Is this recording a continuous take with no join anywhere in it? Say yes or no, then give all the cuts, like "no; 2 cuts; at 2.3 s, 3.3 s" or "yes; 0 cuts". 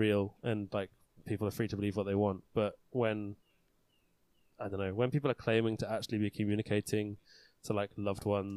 yes; 0 cuts